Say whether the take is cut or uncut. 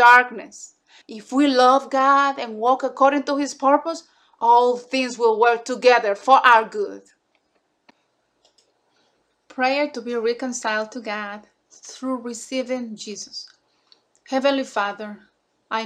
cut